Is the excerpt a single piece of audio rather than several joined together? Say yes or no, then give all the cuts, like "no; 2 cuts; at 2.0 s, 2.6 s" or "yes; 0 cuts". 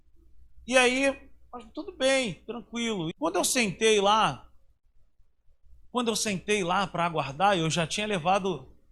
no; 2 cuts; at 3.1 s, 5.8 s